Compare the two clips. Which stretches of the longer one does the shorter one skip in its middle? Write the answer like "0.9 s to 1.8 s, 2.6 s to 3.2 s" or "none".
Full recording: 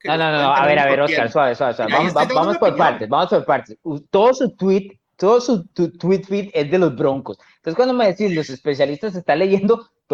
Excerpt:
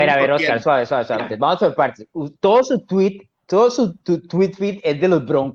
1.9 s to 2.9 s